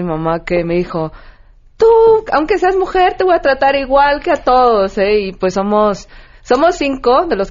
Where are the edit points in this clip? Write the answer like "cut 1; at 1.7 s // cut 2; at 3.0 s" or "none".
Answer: none

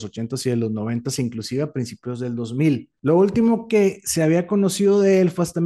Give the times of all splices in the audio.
cut 1; at 3.0 s

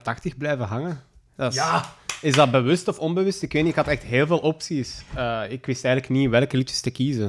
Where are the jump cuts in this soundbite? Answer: none

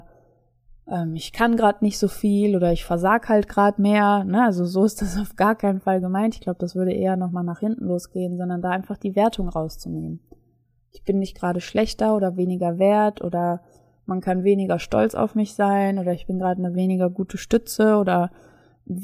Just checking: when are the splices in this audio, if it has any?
none

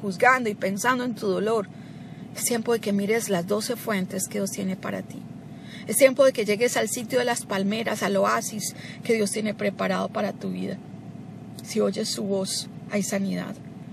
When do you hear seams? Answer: none

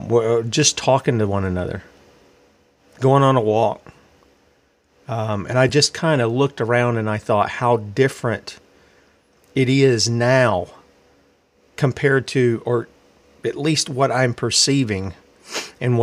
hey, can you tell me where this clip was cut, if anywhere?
none

